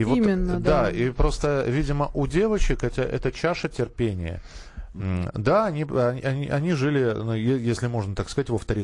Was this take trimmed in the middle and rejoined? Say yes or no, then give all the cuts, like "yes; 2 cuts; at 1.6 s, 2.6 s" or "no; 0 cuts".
no; 0 cuts